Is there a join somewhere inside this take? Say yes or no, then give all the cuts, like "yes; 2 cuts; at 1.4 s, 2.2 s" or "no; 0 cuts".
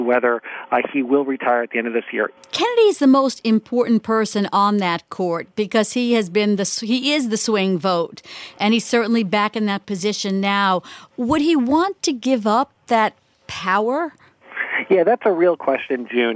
yes; 1 cut; at 2.4 s